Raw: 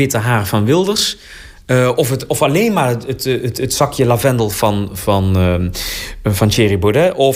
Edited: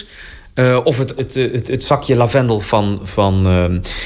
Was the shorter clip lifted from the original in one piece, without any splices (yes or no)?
no